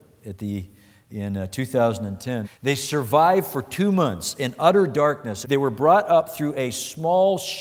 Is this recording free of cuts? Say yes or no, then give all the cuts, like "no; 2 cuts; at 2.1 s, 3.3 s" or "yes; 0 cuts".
no; 2 cuts; at 2.4 s, 5.4 s